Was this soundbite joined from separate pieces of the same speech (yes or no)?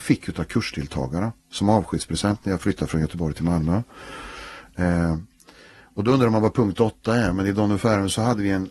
no